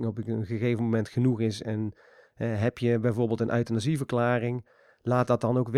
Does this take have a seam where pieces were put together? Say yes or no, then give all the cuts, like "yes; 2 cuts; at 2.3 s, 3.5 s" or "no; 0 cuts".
no; 0 cuts